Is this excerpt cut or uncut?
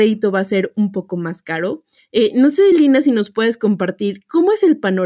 uncut